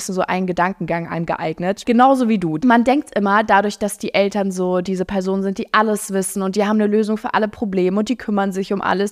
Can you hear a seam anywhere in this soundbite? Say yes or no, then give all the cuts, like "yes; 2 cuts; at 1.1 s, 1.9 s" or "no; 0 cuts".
yes; 1 cut; at 1.8 s